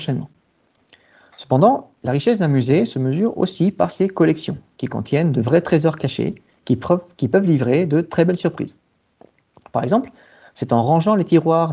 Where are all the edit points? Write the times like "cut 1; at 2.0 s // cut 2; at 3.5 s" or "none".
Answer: none